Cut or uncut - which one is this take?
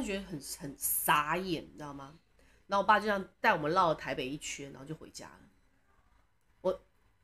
uncut